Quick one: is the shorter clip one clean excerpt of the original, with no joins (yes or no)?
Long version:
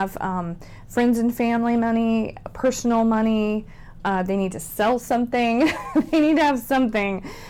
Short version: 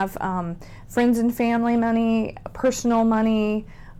yes